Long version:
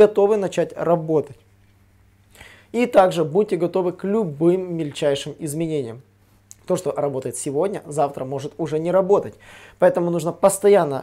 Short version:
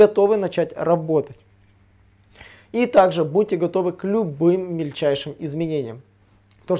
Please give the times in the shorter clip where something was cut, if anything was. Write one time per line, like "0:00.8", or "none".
none